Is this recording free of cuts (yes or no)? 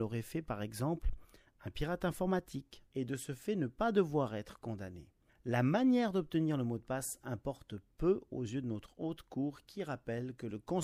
no